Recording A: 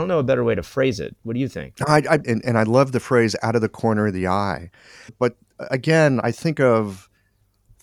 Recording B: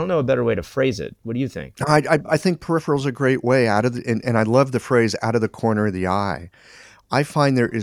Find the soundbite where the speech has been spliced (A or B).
A